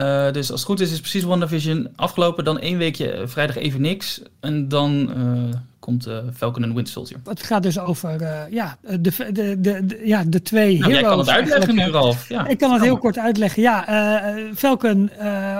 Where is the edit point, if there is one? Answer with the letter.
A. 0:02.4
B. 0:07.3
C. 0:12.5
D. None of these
B